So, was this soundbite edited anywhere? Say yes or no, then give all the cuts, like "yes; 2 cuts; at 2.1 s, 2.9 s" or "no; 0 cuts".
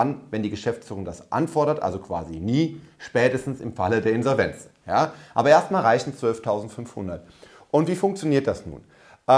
no; 0 cuts